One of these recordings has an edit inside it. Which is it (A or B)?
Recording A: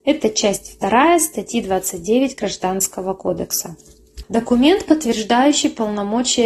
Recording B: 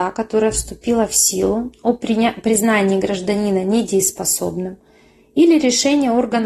A